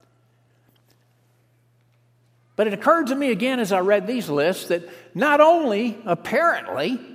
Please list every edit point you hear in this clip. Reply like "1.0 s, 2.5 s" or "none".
none